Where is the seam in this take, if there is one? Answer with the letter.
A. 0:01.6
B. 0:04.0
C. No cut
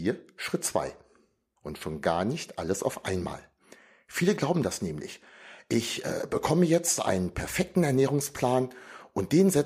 A